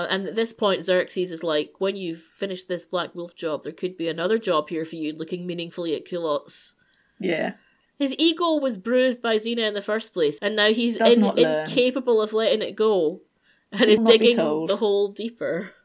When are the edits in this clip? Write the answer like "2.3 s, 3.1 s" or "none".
7.9 s, 10.4 s, 14.0 s